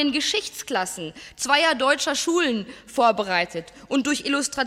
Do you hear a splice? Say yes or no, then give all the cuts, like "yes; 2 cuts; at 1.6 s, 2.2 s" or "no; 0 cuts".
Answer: no; 0 cuts